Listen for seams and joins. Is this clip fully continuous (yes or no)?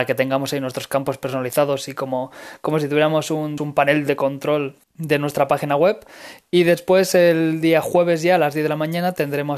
no